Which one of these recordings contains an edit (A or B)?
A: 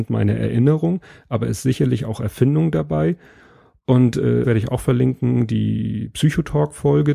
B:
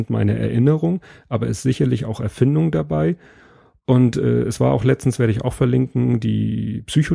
A